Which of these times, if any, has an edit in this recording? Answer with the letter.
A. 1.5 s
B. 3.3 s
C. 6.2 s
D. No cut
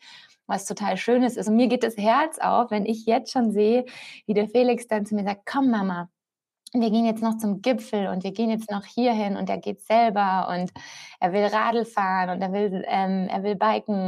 D